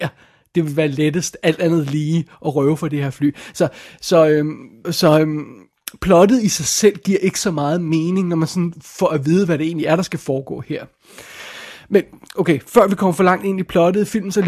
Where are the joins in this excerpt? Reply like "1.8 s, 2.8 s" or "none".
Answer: 4.8 s